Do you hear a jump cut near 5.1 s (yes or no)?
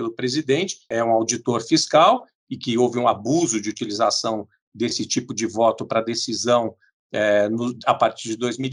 no